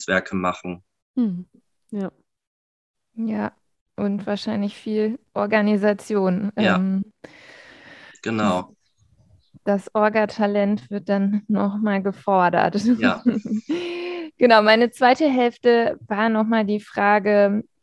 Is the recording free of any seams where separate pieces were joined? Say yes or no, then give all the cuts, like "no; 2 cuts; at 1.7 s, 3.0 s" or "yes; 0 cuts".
yes; 0 cuts